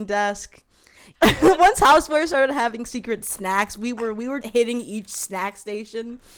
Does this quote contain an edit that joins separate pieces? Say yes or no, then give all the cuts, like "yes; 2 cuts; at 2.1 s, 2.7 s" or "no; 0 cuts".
yes; 2 cuts; at 1.1 s, 4.4 s